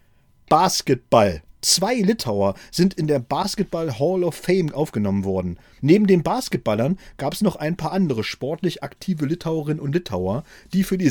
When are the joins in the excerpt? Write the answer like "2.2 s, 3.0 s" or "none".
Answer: 1.6 s, 5.8 s